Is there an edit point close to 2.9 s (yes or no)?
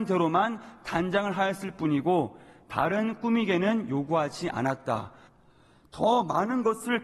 no